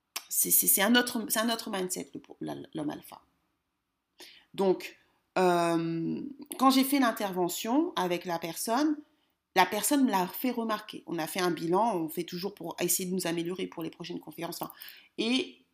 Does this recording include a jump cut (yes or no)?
no